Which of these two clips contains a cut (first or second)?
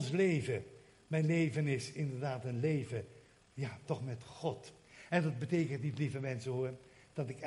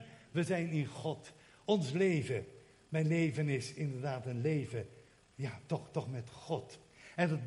first